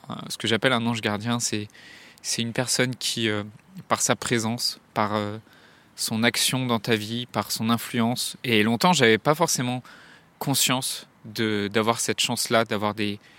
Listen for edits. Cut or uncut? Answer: cut